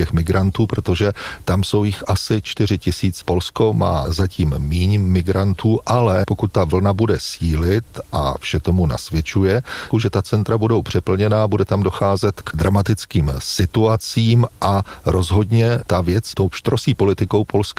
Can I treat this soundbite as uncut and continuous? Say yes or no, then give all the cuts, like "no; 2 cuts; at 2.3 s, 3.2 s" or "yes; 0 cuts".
no; 2 cuts; at 3.2 s, 9.9 s